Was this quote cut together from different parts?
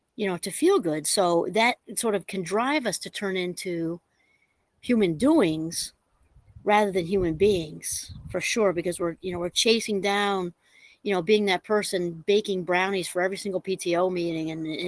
no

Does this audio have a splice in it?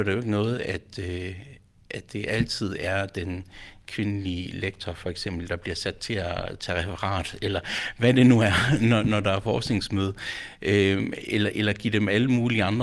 no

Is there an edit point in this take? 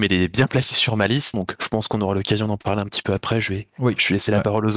yes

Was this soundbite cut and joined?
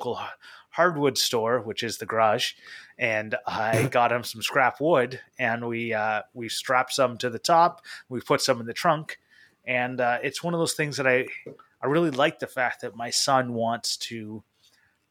no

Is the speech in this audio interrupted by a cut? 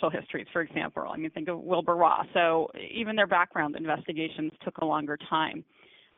yes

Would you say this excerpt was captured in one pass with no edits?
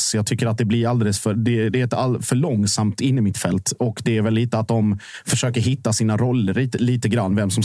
yes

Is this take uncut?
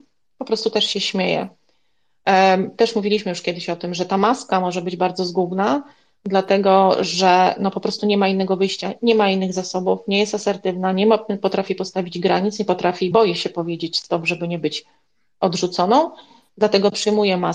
yes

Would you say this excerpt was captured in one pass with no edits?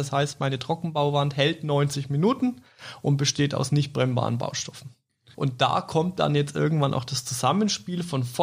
no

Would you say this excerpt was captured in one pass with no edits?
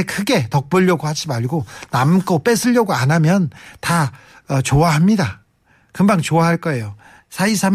yes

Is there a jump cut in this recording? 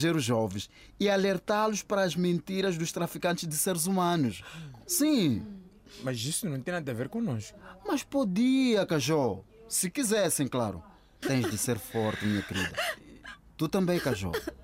yes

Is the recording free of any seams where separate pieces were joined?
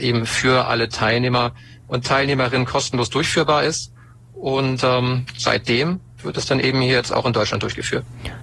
yes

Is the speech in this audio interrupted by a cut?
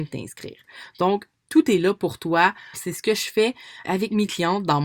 yes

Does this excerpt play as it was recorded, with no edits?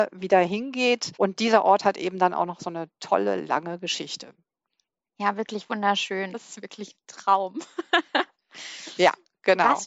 no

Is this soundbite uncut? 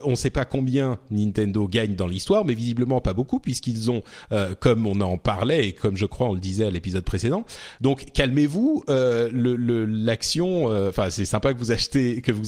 no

